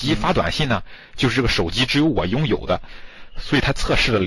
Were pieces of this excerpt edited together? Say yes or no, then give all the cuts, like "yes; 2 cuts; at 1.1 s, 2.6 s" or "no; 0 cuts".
no; 0 cuts